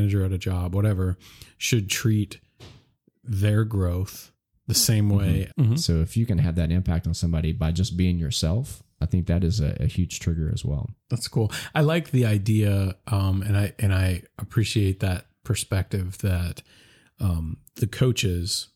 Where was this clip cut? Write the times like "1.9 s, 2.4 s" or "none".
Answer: 5.5 s